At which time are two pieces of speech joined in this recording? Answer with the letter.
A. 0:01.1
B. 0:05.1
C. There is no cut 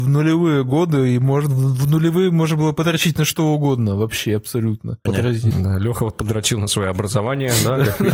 B